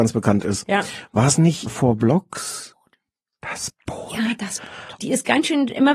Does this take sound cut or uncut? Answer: cut